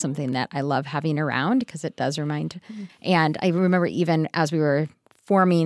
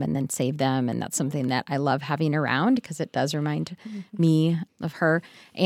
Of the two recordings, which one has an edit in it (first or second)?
first